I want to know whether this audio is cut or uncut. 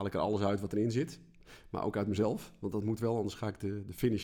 uncut